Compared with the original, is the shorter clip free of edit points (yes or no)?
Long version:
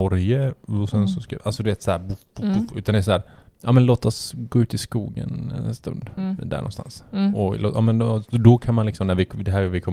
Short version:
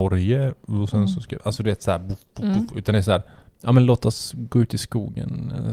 yes